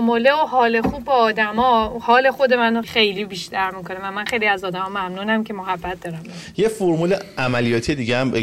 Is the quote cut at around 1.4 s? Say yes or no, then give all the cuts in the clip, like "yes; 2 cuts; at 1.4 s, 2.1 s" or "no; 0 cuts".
no; 1 cut; at 2.8 s